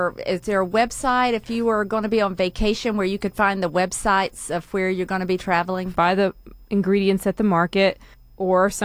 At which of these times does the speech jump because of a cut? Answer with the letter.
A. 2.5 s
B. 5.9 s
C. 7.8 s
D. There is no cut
B